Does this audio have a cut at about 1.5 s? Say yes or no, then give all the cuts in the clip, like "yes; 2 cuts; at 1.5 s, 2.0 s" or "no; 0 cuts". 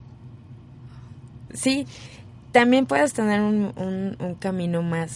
yes; 1 cut; at 1.5 s